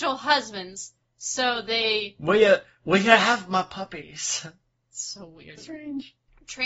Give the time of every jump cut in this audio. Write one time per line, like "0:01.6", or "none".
0:05.6